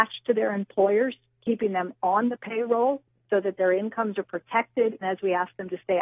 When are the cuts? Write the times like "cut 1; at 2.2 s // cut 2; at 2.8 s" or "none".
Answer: cut 1; at 5.0 s